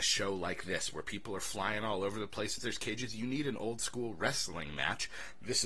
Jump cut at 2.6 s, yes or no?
yes